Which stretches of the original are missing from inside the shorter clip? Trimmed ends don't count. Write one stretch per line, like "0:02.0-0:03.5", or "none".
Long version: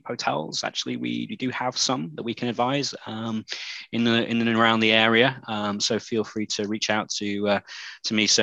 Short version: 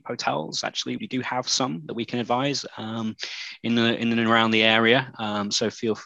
0:01.0-0:01.3